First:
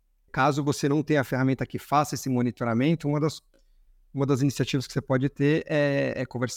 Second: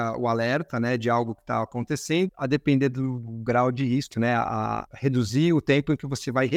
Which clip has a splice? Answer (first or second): second